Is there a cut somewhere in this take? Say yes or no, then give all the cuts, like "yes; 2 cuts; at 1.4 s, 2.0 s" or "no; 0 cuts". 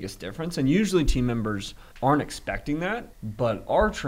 yes; 2 cuts; at 1.9 s, 3.1 s